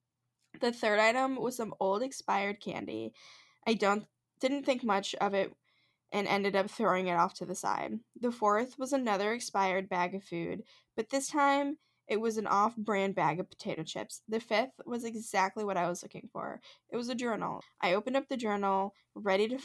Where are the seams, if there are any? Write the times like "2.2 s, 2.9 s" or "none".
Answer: 14.2 s, 17.6 s

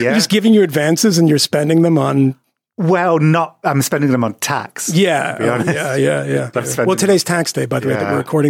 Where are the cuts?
6.5 s

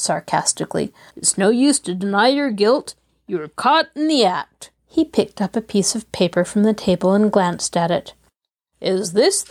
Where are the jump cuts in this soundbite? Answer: 1.1 s, 4.8 s

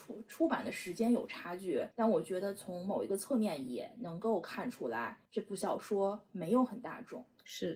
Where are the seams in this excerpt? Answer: 1.9 s, 5.3 s

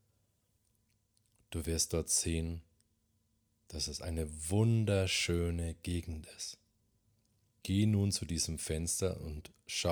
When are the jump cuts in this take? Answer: 7.5 s

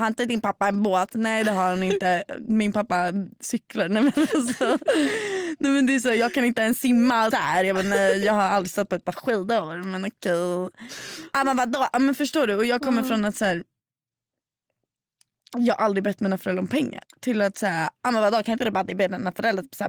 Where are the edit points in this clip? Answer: 7.3 s, 17.0 s

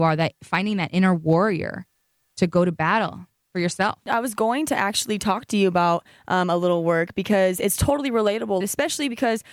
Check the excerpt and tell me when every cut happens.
8.6 s

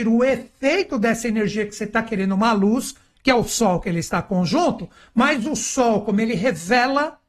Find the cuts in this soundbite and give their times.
none

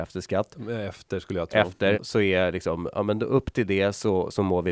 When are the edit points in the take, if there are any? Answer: 1.9 s

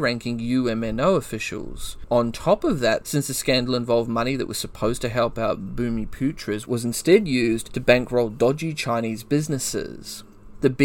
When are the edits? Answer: 3.0 s

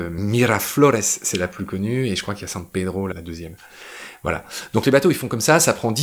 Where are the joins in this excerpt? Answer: none

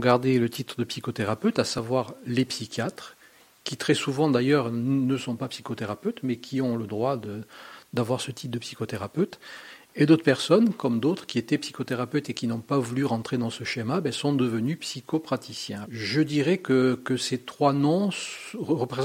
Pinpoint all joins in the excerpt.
10.8 s, 15.8 s

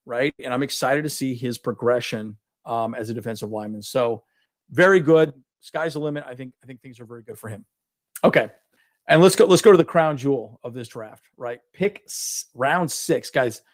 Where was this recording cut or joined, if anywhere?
none

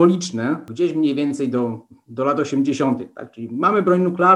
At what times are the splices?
none

